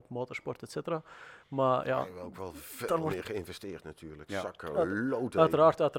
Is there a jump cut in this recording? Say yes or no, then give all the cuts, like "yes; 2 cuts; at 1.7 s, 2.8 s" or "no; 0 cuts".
no; 0 cuts